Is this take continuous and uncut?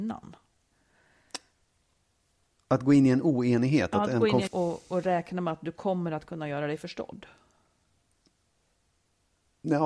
no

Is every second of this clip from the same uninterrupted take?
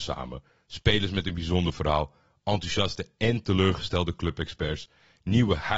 yes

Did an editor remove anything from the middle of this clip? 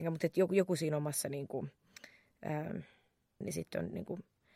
yes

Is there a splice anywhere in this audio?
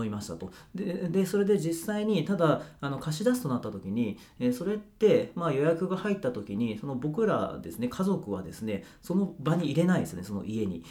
no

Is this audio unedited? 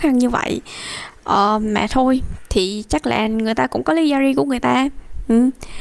yes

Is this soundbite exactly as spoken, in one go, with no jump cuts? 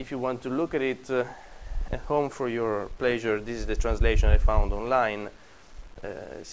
yes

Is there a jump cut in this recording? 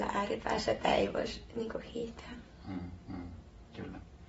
no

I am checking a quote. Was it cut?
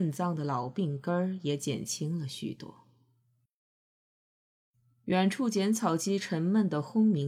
no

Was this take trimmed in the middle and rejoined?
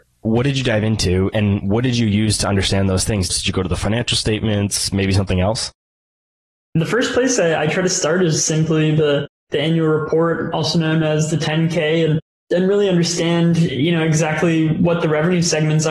yes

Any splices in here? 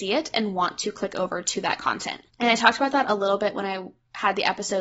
yes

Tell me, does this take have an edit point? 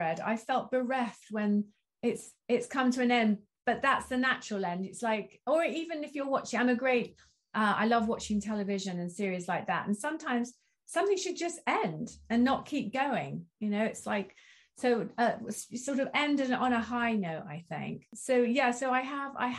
no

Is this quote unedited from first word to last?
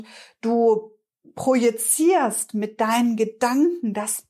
yes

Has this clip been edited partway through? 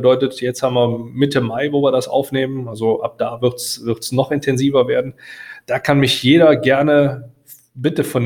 no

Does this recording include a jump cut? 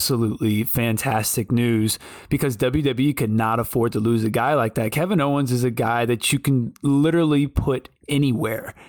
no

